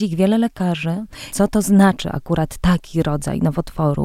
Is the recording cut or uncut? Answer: cut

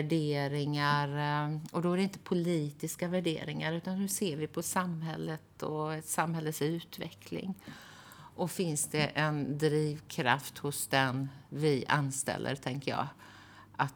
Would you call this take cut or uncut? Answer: uncut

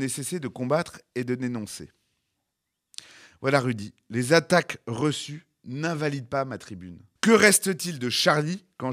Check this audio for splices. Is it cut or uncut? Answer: cut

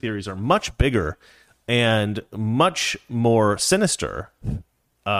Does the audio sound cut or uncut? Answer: uncut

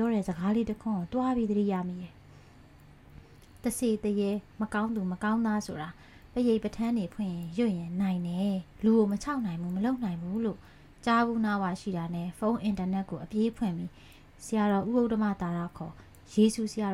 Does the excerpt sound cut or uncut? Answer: cut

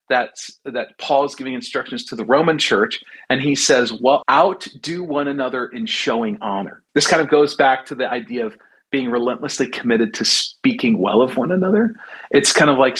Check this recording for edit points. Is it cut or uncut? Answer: cut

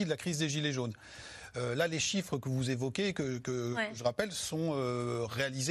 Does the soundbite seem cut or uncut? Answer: uncut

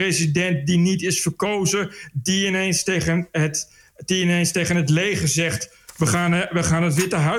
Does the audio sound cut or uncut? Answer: uncut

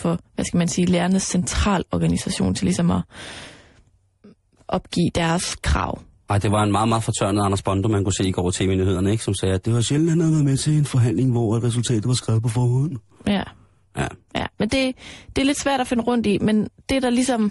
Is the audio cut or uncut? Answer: uncut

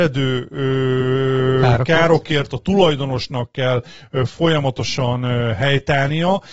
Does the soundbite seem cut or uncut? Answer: uncut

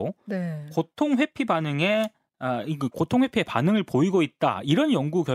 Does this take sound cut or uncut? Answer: uncut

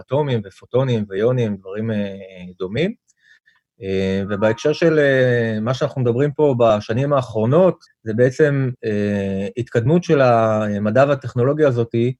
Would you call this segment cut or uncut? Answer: cut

